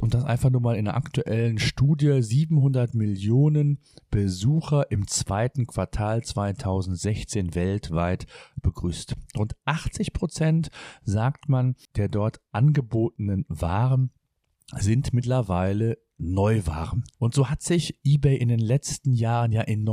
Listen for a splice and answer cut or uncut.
uncut